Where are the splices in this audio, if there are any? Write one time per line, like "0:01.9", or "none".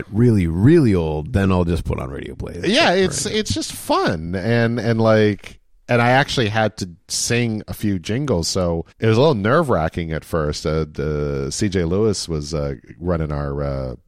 0:08.9